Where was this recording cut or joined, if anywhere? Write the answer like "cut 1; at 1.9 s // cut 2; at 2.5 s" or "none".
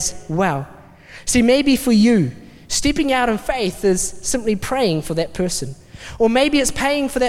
none